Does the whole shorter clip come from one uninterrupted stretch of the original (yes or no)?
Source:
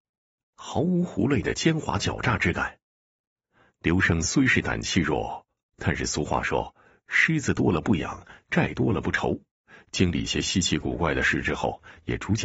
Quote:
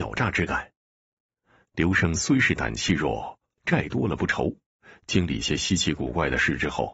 no